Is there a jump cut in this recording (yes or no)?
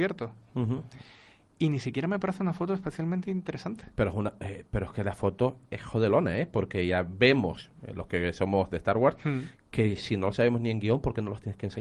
yes